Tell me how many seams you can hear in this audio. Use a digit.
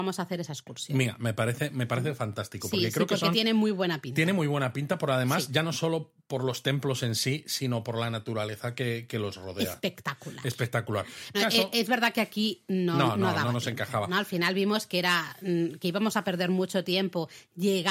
1